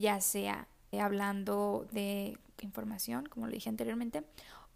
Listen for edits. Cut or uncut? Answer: cut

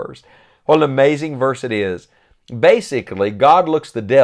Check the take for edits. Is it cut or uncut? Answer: uncut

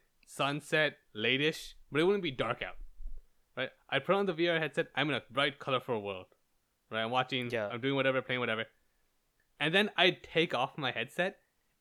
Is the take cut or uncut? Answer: uncut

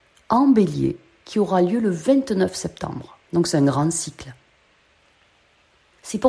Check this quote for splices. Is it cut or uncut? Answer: cut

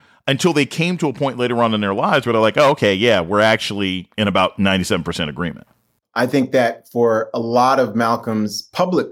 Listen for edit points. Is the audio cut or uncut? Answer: cut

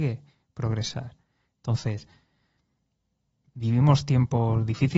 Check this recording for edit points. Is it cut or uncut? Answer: uncut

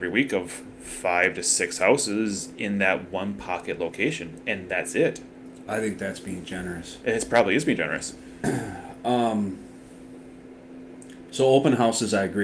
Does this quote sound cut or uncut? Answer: uncut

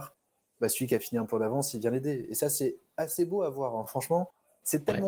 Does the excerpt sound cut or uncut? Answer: uncut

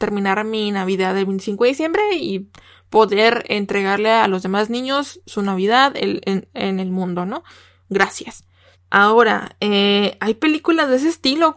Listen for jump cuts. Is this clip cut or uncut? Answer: cut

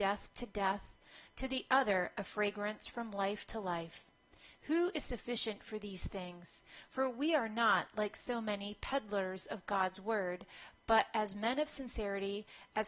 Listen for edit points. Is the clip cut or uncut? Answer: uncut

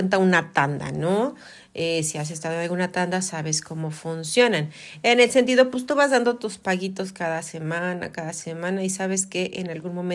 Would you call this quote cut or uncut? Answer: uncut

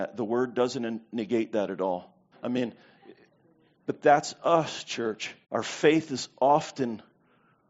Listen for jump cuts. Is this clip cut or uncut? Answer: cut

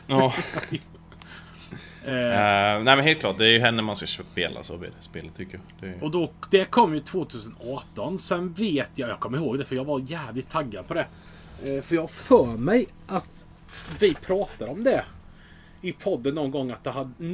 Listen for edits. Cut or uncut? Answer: uncut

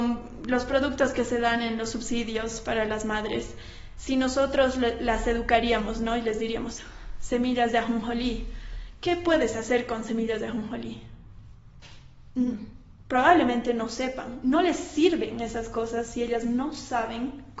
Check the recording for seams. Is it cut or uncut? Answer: uncut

